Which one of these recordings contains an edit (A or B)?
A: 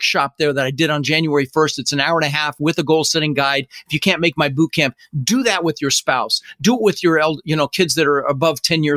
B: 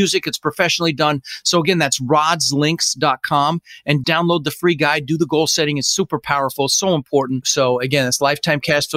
B